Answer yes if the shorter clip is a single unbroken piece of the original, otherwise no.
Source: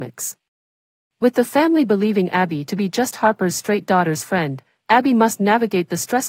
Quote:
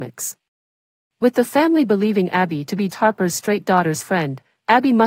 no